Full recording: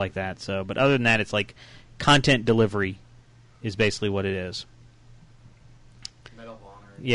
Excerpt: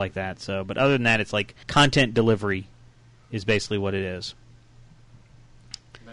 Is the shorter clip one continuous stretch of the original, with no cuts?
no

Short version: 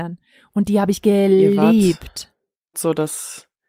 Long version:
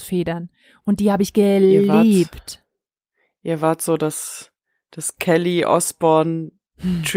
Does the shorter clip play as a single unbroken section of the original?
no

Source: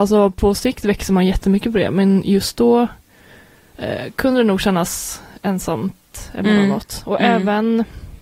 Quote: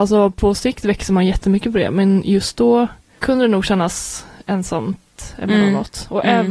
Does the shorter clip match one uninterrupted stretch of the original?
no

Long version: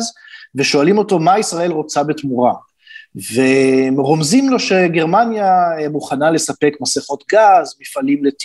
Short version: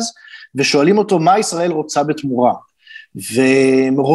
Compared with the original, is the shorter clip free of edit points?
yes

